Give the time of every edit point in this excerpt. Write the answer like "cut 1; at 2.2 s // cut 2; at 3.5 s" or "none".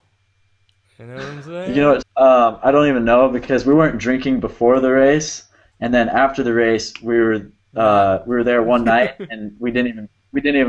cut 1; at 2.0 s